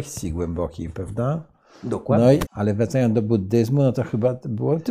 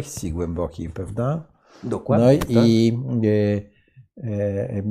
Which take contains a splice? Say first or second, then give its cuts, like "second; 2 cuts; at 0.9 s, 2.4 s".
first; 1 cut; at 2.5 s